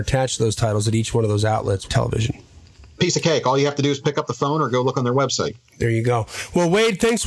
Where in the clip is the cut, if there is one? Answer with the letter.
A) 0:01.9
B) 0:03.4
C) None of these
A